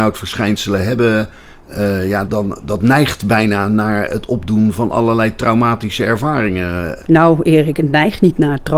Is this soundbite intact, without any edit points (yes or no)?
no